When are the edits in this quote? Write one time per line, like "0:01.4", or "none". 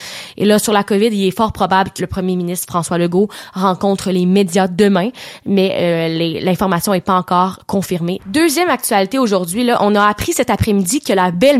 0:02.0
0:08.2

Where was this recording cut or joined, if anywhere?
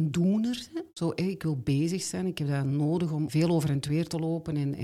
0:03.3

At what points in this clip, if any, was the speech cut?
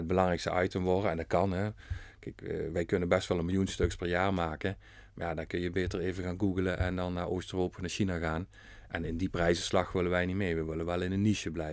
none

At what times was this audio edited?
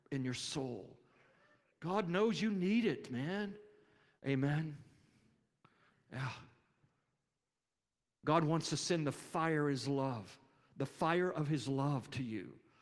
0:04.2

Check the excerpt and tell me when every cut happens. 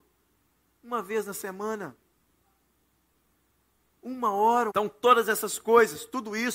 0:04.7

